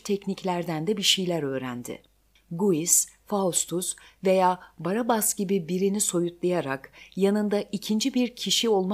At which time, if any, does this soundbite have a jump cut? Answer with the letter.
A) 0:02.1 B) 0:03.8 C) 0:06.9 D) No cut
D